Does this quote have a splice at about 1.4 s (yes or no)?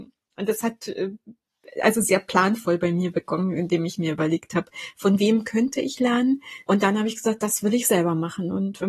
no